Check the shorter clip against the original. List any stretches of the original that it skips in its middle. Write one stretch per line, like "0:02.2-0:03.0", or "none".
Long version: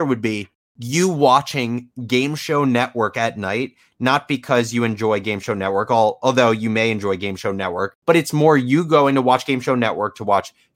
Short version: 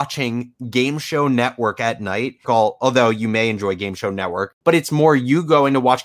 0:03.8-0:05.9